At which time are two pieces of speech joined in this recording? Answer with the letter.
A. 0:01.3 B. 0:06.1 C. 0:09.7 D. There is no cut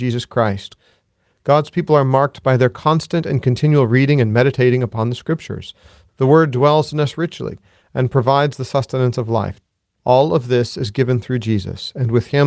D